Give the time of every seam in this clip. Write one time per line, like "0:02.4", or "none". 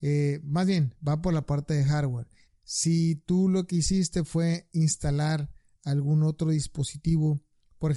0:02.5